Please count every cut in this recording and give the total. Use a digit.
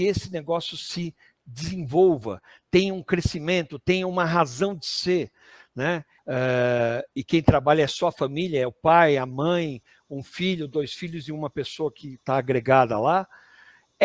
1